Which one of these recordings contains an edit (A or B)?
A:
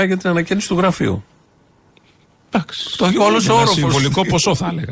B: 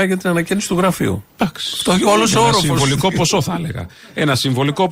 B